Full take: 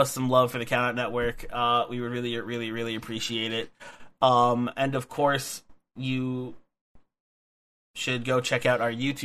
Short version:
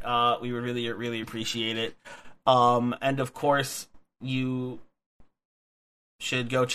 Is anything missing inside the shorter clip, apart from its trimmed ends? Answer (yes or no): yes